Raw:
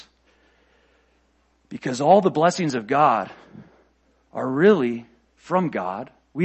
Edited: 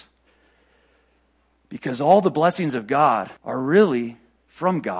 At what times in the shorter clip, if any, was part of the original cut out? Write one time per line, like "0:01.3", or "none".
0:03.4

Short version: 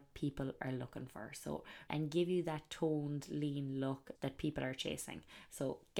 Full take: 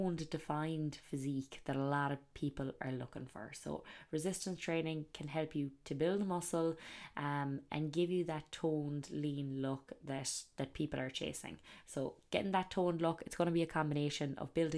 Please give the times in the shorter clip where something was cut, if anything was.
0:01.9
0:04.1

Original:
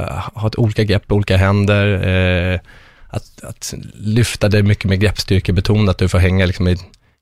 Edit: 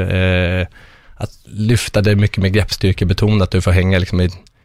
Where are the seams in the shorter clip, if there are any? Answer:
0:01.4

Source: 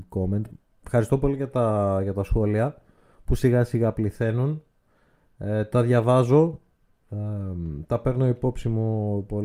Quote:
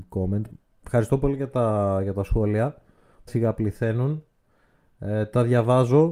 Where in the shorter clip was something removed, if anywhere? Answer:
0:03.3

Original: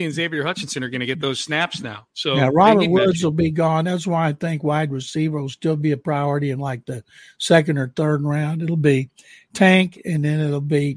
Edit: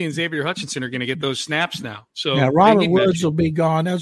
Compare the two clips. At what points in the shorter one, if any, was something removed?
none

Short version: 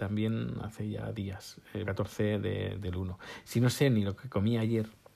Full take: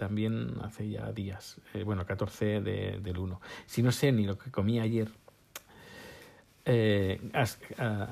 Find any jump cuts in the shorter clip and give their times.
0:01.8

